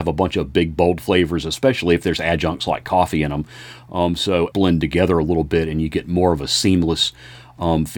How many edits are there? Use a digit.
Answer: 1